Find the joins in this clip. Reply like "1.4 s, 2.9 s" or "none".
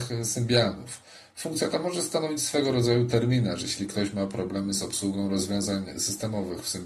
none